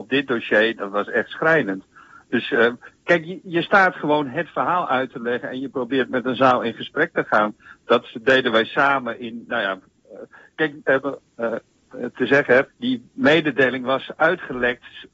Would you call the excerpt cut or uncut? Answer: cut